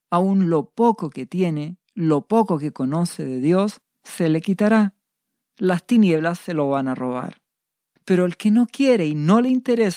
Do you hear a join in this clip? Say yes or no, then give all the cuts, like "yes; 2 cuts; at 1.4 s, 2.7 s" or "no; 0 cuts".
yes; 1 cut; at 8.0 s